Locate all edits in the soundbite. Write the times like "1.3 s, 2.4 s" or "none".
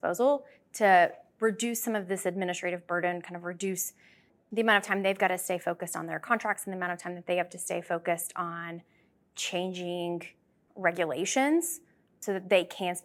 none